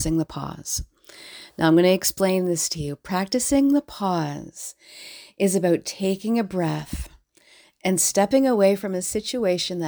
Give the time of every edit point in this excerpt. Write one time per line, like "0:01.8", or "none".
none